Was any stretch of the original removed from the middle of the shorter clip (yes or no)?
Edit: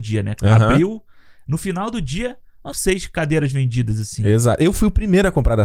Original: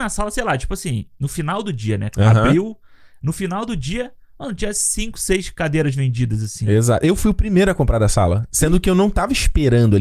yes